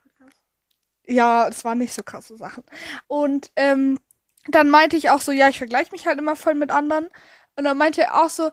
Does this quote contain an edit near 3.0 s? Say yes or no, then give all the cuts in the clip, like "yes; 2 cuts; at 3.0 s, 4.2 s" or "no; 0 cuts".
yes; 1 cut; at 3.0 s